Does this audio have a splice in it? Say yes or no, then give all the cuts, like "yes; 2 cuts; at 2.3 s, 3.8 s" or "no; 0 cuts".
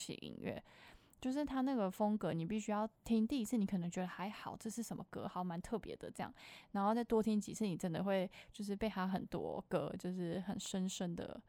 no; 0 cuts